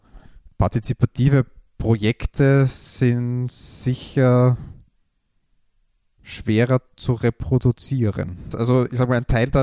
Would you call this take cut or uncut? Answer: cut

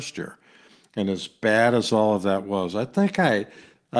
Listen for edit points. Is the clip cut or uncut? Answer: uncut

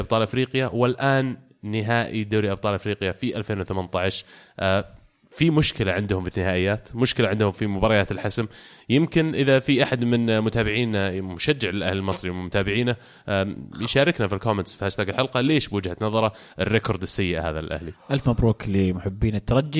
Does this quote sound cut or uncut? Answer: uncut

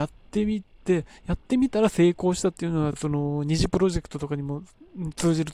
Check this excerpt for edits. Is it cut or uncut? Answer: uncut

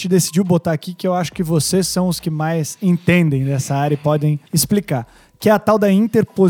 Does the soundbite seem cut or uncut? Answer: cut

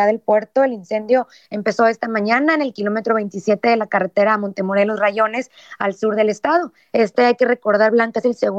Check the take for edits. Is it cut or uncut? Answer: cut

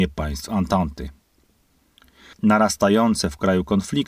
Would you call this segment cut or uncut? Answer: cut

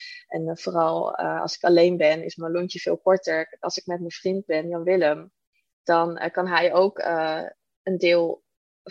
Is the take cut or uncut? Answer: uncut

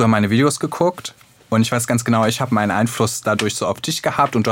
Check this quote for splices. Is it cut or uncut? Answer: uncut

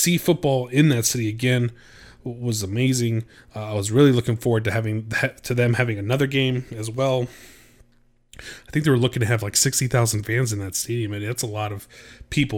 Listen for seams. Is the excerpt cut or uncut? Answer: uncut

